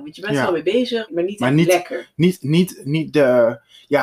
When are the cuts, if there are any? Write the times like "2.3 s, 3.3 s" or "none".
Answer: 1.1 s